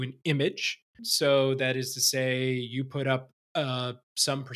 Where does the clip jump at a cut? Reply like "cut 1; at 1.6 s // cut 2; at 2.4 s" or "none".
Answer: cut 1; at 1.0 s